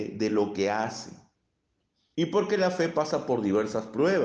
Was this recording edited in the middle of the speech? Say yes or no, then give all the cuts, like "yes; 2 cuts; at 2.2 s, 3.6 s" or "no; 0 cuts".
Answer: yes; 1 cut; at 2.1 s